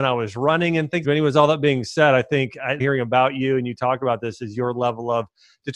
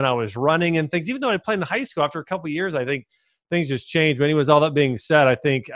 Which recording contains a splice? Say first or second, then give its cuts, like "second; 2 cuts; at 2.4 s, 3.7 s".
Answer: first; 2 cuts; at 1.0 s, 2.8 s